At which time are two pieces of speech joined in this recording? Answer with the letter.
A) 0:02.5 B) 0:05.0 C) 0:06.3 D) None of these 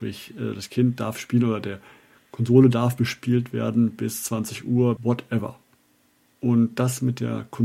B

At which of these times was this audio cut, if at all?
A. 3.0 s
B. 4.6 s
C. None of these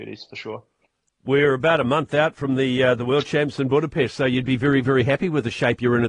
C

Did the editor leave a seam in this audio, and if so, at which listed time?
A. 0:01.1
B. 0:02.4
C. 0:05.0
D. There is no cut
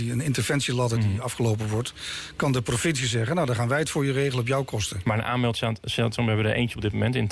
D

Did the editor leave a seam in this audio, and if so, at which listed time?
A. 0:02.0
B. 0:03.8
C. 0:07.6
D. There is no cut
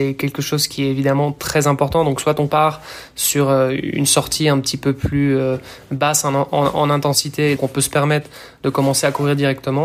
C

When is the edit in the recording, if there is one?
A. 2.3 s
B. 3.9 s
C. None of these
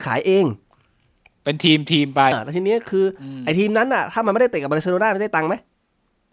A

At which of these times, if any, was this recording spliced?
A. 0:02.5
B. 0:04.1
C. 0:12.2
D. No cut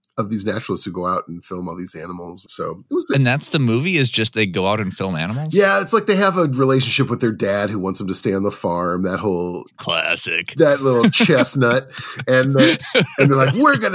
A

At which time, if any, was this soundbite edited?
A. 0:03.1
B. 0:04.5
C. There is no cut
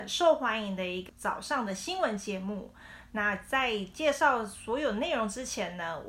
A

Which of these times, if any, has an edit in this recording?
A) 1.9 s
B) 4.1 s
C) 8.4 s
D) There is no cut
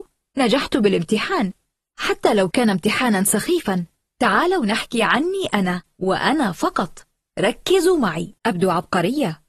C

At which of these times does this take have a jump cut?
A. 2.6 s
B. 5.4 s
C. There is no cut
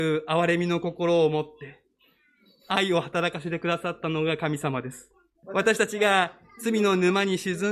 B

